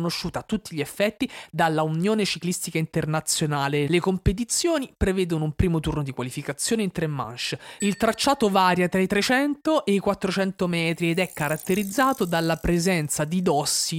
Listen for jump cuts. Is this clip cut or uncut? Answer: cut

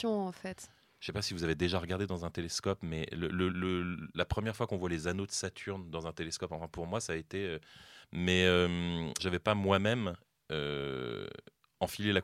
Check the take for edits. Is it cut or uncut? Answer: cut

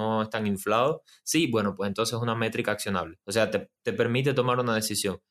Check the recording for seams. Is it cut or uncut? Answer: cut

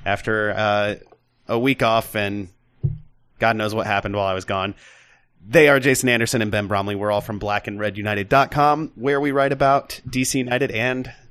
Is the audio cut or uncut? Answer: uncut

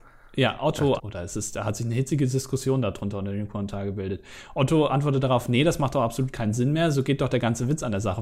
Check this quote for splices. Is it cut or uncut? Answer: cut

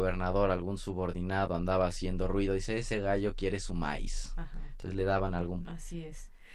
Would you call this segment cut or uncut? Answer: cut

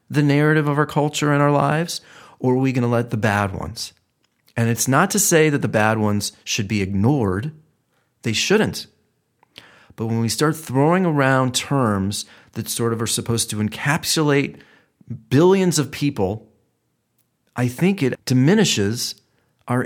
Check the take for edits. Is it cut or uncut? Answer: cut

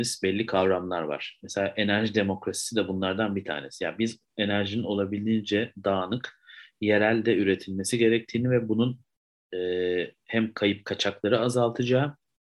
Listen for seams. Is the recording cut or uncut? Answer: uncut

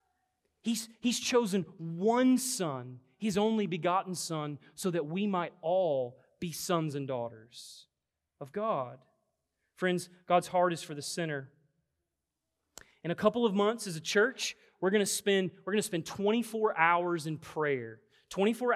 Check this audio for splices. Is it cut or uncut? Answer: uncut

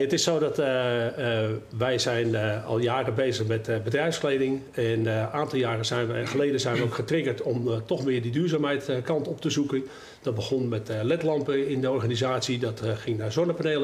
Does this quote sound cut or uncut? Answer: uncut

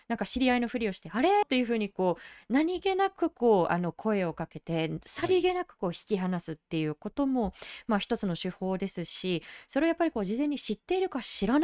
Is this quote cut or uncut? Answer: cut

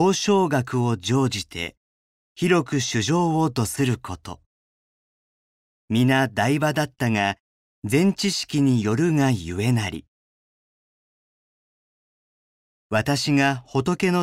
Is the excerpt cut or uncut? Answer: uncut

